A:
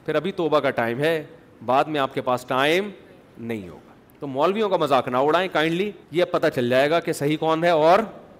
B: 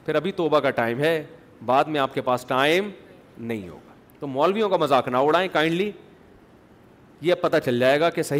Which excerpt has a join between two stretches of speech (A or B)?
A